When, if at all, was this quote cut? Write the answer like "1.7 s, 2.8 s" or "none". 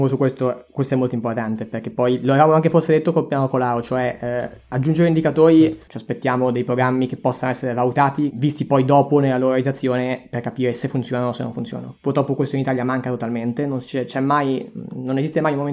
5.9 s, 8.3 s